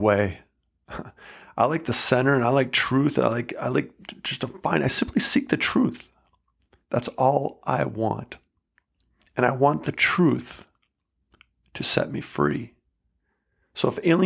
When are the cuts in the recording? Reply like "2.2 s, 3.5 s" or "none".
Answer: none